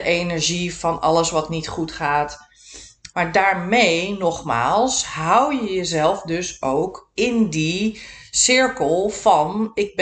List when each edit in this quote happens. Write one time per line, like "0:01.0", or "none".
0:03.1